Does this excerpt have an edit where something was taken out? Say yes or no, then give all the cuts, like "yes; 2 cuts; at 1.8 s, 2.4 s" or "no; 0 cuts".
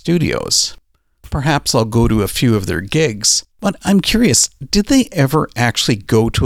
yes; 1 cut; at 3.5 s